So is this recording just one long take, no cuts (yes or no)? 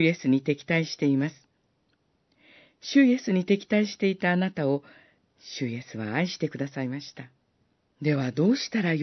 no